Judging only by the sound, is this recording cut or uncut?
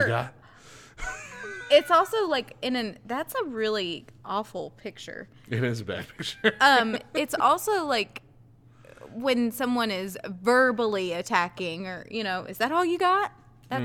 uncut